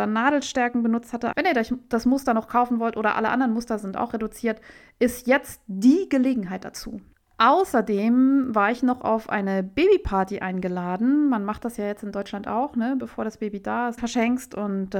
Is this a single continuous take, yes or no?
no